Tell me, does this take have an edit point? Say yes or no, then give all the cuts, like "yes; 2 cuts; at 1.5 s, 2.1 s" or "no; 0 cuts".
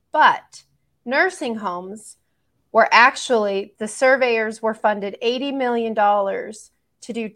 yes; 1 cut; at 3.8 s